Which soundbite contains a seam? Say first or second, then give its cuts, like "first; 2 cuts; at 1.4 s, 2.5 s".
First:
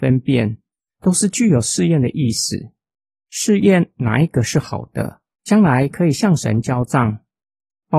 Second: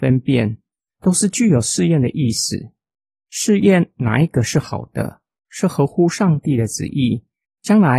first; 1 cut; at 5.3 s